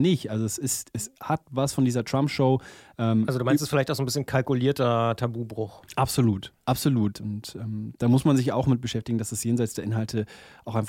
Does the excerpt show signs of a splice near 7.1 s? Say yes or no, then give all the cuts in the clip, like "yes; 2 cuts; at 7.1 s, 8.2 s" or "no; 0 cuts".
yes; 1 cut; at 7.1 s